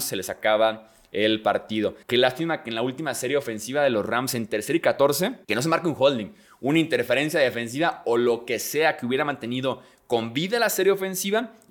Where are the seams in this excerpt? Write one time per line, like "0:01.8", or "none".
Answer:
0:02.0
0:05.4